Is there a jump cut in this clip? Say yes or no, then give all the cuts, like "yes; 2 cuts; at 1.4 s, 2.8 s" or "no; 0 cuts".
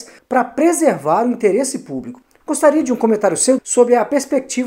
yes; 2 cuts; at 2.4 s, 3.6 s